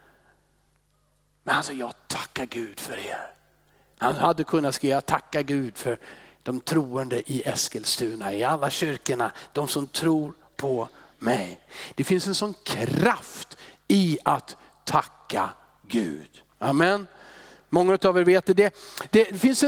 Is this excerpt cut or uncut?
cut